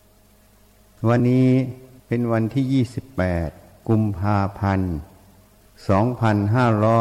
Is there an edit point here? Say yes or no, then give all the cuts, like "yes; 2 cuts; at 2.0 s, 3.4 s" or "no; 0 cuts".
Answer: yes; 1 cut; at 1.2 s